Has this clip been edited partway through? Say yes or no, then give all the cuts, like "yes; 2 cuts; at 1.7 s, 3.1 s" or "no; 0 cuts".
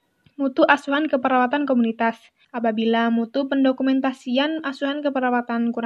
yes; 1 cut; at 2.4 s